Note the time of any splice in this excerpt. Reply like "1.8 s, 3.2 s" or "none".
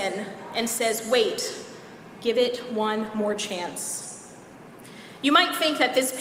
2.1 s